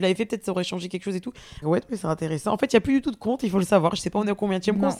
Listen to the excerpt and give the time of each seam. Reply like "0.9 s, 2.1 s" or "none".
1.6 s